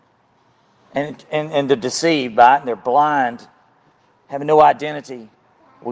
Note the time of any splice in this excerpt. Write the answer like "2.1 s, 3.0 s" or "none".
none